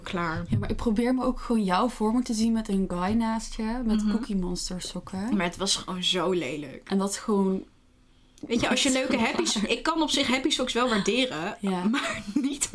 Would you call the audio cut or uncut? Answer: uncut